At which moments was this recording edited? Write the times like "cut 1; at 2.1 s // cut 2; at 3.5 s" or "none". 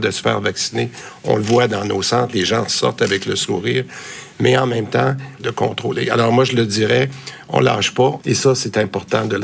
cut 1; at 5.4 s // cut 2; at 8.2 s